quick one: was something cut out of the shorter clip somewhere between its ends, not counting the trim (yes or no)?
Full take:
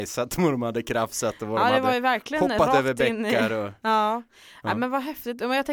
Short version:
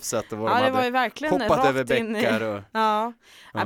no